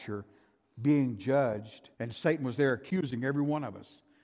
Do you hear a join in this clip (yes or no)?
yes